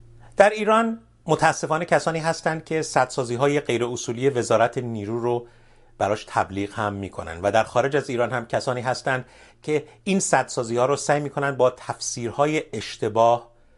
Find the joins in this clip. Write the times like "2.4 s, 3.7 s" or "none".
none